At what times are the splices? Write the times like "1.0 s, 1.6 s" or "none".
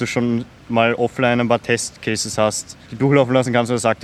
2.9 s

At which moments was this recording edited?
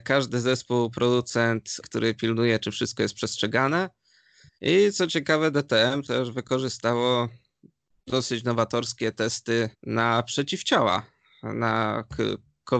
1.8 s, 4.5 s, 9.7 s

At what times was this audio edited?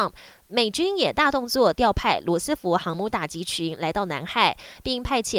none

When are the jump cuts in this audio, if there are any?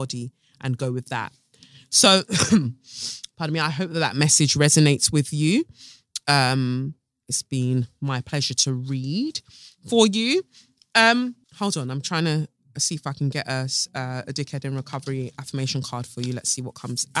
11.4 s

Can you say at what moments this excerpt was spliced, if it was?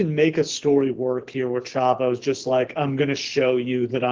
none

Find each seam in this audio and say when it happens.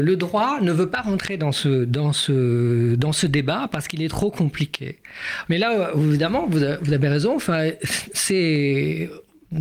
5.4 s

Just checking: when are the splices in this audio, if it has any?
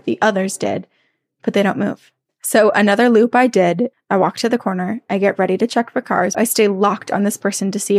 2.3 s, 3.9 s, 6.3 s

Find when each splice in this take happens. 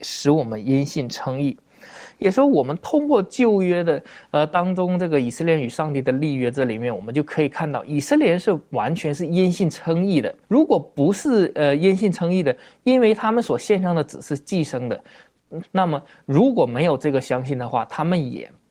10.4 s, 15.6 s

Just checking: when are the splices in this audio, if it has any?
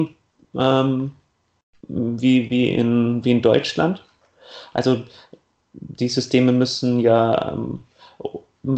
none

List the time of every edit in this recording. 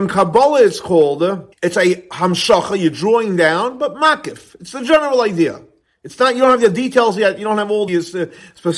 1.5 s, 7.9 s

